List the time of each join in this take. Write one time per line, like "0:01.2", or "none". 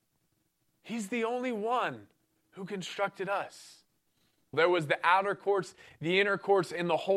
0:04.5